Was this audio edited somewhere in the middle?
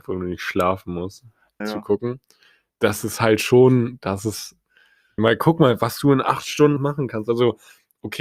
yes; 3 cuts; at 1.6 s, 5.2 s, 6.8 s

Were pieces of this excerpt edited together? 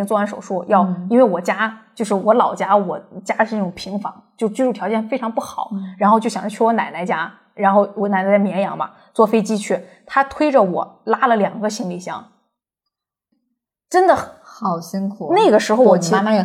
no; 0 cuts

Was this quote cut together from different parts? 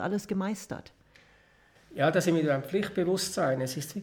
no; 0 cuts

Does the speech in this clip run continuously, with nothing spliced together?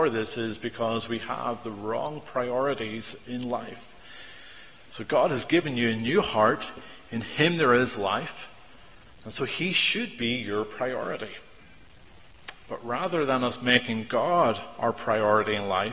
yes; 0 cuts

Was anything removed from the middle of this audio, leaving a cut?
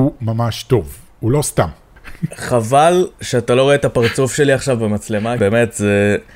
yes; 2 cuts; at 2.0 s, 5.4 s

